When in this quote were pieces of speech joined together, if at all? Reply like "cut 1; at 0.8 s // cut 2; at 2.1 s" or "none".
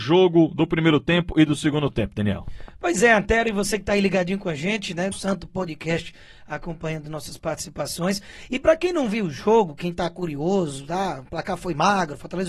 cut 1; at 5.1 s